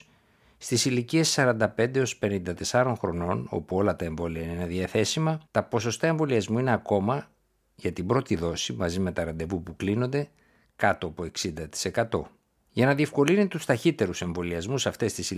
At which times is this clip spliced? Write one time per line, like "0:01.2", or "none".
0:05.4
0:12.7

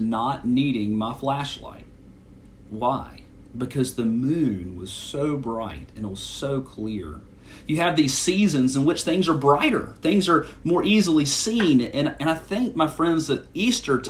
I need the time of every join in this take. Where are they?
none

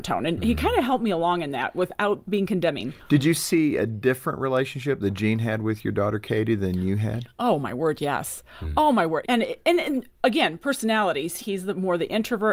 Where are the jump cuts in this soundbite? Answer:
0:09.2
0:11.4

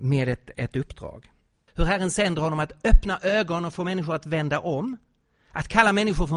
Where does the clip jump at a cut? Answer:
0:01.7

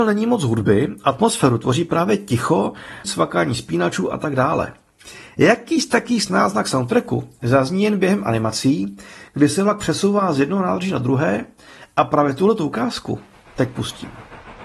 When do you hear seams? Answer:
0:03.0

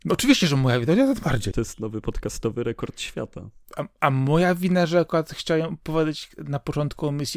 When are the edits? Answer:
0:01.5

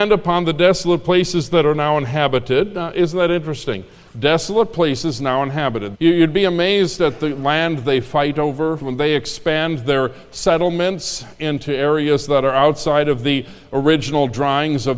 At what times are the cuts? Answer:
0:05.9
0:08.8

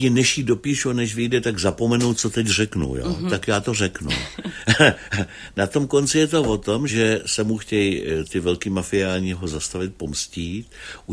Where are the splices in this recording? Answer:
0:06.9

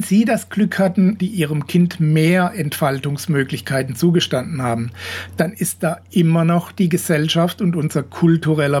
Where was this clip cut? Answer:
0:01.2

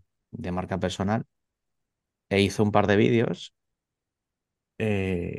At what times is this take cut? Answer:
none

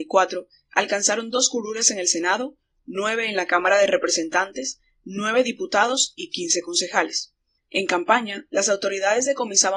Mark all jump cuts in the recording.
0:07.6

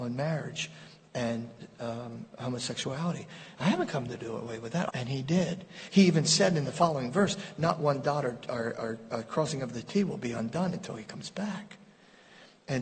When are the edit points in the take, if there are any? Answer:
0:04.9

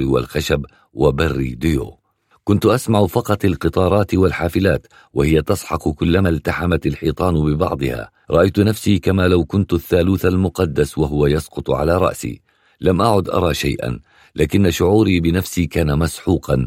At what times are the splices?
0:08.2

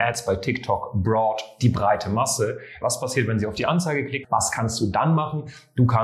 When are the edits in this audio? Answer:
0:02.8
0:04.2

